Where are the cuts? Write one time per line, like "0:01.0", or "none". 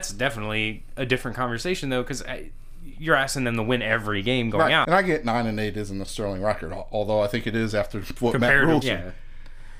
0:04.8
0:08.8